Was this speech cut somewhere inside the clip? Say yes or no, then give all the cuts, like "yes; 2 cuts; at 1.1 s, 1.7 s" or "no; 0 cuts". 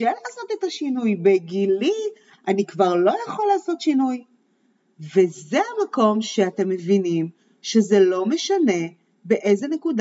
no; 0 cuts